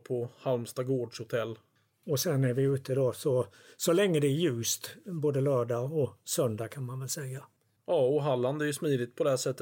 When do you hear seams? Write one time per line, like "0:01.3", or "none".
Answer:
none